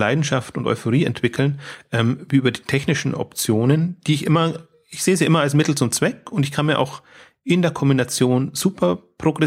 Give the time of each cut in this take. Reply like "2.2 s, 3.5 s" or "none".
none